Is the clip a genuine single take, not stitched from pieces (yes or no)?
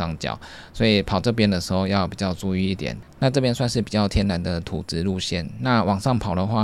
yes